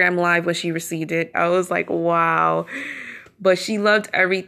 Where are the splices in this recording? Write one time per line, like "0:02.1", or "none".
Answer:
0:01.3